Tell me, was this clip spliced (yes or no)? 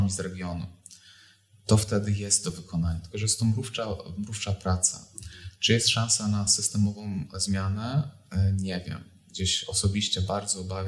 no